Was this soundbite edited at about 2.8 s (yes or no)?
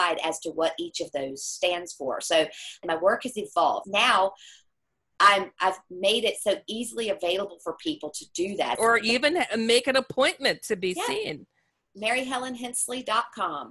yes